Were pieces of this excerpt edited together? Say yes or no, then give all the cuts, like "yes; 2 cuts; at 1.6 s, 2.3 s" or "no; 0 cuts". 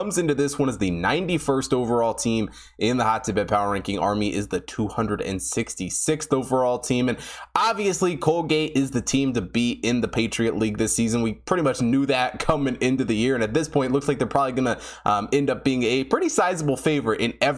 no; 0 cuts